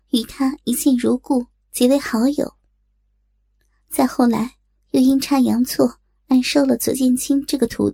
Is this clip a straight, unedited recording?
yes; 0 cuts

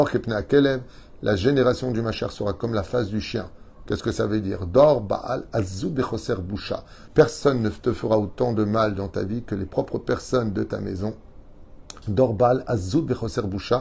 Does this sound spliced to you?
yes; 2 cuts; at 7.1 s, 12.0 s

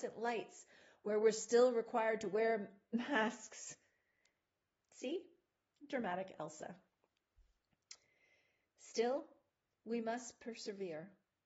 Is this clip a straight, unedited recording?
yes; 0 cuts

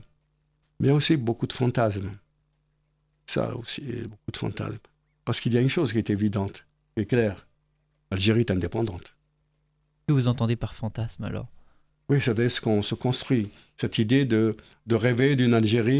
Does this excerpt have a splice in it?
no; 0 cuts

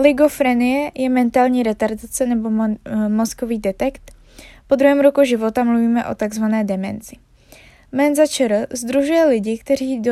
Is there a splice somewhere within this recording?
no; 0 cuts

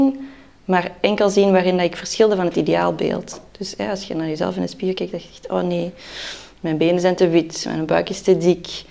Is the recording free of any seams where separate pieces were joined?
yes; 0 cuts

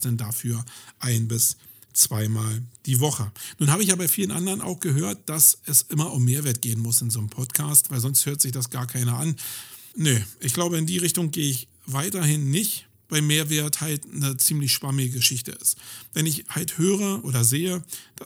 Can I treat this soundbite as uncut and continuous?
no; 1 cut; at 9.9 s

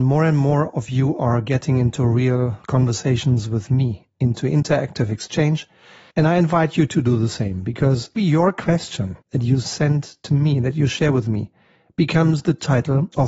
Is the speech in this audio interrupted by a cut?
yes; 3 cuts; at 6.1 s, 8.2 s, 9.2 s

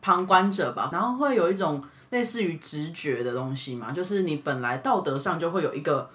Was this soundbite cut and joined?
yes; 1 cut; at 0.9 s

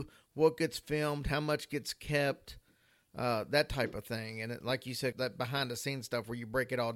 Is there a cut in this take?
yes; 1 cut; at 5.1 s

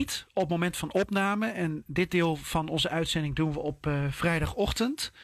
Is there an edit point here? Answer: no; 0 cuts

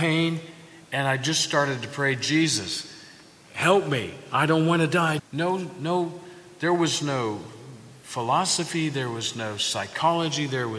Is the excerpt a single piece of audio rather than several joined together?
no; 1 cut; at 5.2 s

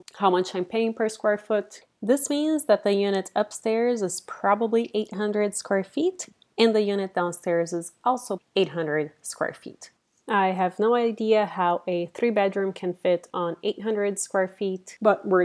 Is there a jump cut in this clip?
yes; 1 cut; at 8.4 s

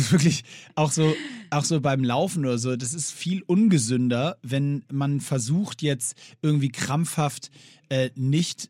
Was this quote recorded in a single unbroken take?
yes; 0 cuts

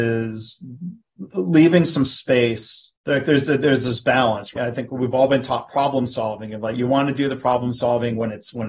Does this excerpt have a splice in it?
yes; 2 cuts; at 3.0 s, 4.6 s

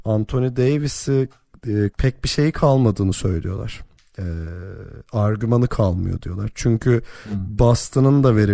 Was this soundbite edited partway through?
yes; 1 cut; at 1.9 s

